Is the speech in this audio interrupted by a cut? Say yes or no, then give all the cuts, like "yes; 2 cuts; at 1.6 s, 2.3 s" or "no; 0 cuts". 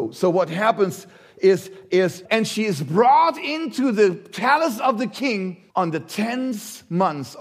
yes; 2 cuts; at 2.2 s, 5.7 s